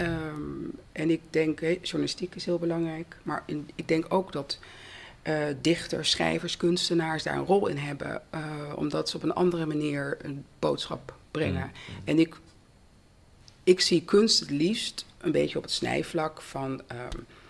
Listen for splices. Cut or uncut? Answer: uncut